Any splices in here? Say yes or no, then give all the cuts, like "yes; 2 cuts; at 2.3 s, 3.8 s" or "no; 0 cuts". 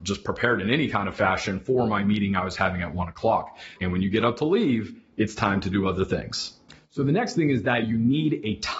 yes; 1 cut; at 3.8 s